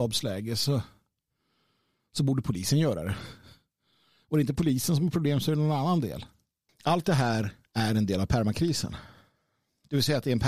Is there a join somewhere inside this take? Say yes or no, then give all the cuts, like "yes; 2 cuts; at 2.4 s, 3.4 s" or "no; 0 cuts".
yes; 1 cut; at 6.7 s